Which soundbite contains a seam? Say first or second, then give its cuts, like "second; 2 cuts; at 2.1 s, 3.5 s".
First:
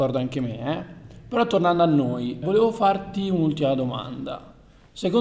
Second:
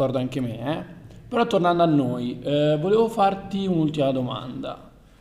first; 1 cut; at 2.4 s